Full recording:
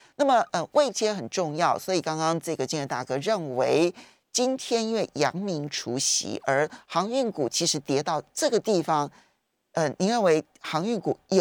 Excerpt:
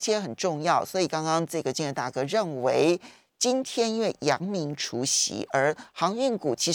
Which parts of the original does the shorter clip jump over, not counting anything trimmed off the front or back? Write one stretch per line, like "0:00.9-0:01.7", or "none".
none